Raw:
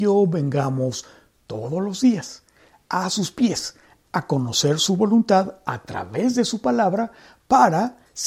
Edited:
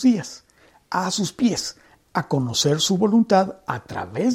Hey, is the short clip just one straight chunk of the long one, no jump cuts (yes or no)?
yes